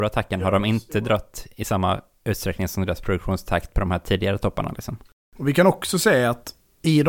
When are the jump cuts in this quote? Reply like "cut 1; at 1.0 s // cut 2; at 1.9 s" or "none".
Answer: none